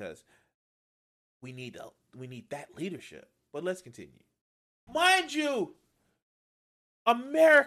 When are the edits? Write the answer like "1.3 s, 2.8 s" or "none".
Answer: 4.9 s